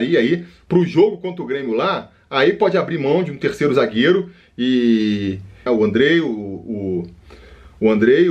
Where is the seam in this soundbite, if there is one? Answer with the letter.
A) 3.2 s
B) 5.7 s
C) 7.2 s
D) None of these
B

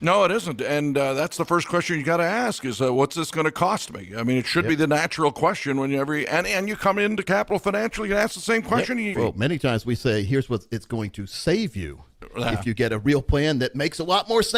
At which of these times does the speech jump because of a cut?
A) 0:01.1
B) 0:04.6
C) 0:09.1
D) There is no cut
C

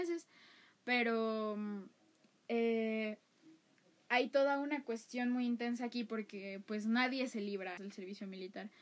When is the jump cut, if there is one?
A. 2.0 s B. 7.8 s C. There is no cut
B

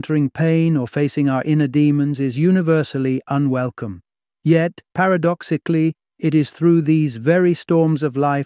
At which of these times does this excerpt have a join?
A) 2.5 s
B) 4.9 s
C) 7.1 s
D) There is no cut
B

